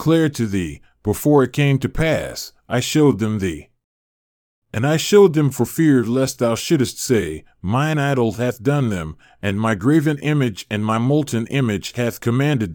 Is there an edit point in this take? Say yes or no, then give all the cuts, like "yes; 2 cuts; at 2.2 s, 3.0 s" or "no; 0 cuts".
no; 0 cuts